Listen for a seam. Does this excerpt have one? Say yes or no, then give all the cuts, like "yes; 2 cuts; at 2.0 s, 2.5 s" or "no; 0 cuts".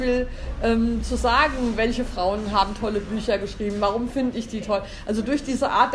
no; 0 cuts